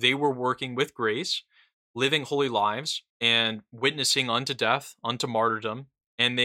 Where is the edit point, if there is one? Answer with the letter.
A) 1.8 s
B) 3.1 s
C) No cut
B